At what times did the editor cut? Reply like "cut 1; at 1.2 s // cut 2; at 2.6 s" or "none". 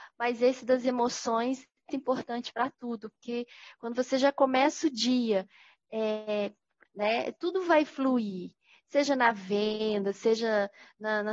cut 1; at 1.9 s // cut 2; at 6.9 s